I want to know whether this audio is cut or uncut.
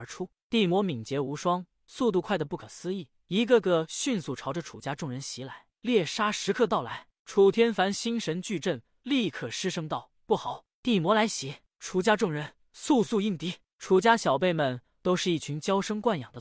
uncut